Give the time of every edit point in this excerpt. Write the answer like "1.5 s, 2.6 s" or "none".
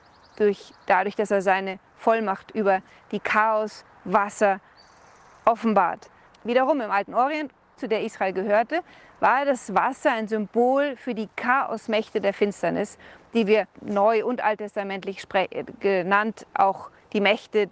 6.3 s, 7.7 s, 13.7 s